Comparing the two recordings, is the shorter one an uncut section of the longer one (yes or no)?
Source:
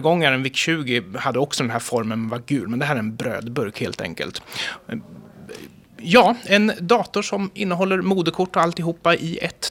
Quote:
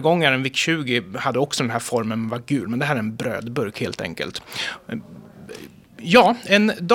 yes